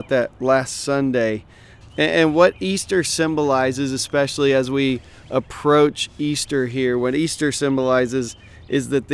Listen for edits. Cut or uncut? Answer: cut